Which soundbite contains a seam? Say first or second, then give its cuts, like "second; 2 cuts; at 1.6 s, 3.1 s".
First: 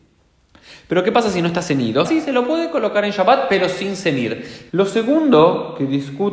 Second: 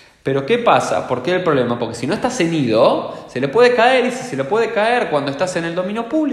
first; 2 cuts; at 2.1 s, 4.7 s